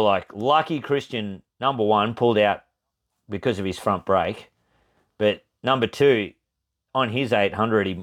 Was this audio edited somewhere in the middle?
no; 0 cuts

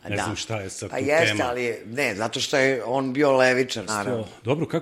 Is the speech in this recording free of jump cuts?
no; 1 cut; at 3.9 s

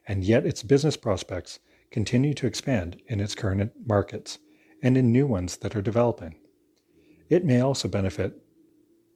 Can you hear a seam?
no; 0 cuts

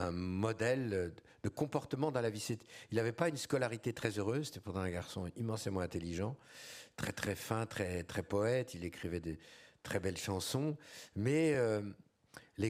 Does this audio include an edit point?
no; 0 cuts

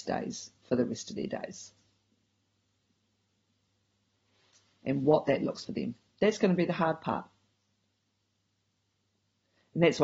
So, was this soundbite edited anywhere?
yes; 1 cut; at 5.6 s

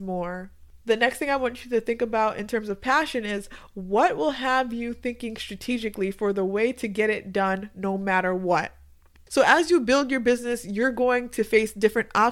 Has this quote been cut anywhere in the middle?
no; 0 cuts

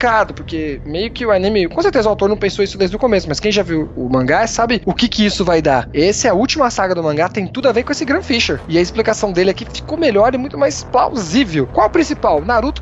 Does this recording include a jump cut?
yes; 1 cut; at 11.7 s

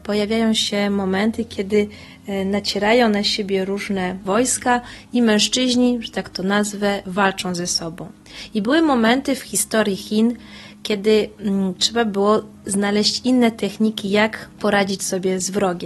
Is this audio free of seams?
no; 1 cut; at 9.4 s

